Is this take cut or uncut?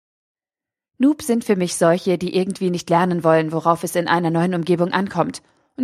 uncut